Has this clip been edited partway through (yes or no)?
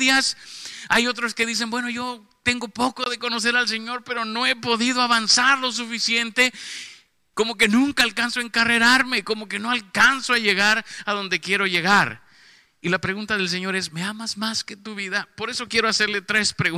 yes